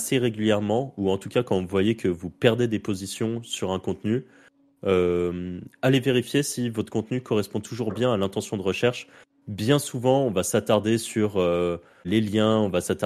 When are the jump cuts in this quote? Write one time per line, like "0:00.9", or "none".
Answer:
0:12.0

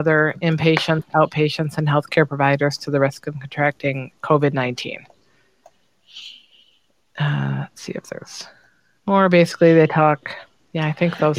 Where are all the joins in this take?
none

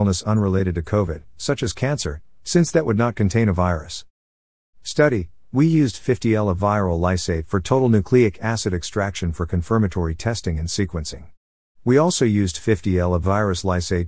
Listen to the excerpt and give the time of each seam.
none

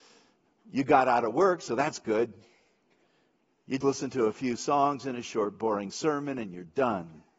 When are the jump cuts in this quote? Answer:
0:03.8

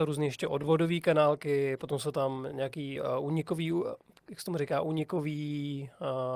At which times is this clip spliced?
none

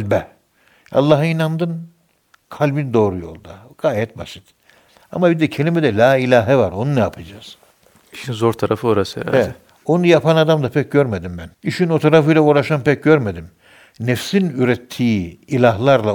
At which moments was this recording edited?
0:11.5

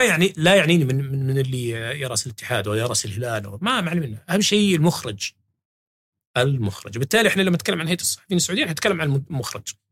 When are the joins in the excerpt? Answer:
none

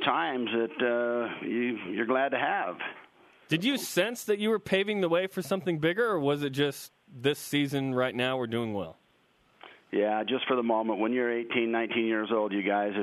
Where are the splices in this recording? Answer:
none

